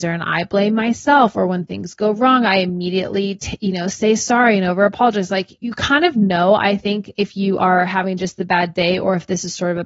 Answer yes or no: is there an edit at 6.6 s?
no